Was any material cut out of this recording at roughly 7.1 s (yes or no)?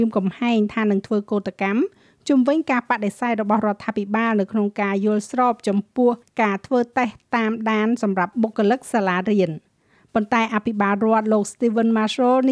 no